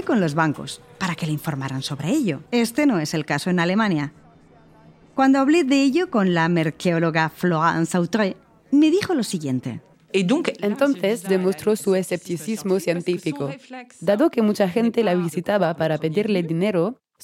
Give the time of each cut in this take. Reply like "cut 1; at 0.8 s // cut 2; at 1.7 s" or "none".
cut 1; at 2.5 s // cut 2; at 9.9 s